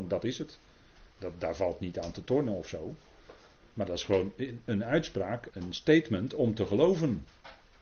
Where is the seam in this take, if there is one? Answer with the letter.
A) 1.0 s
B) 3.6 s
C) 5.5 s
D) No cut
C